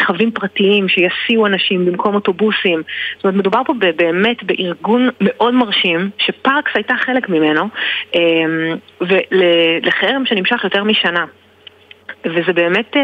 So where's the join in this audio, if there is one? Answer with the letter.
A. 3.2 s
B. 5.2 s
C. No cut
B